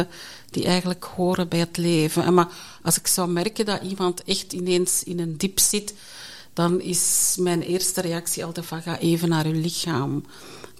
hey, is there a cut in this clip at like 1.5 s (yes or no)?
yes